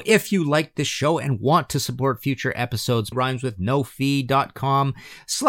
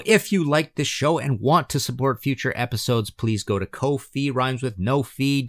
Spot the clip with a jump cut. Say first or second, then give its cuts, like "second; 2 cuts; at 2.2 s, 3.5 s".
first; 1 cut; at 3.1 s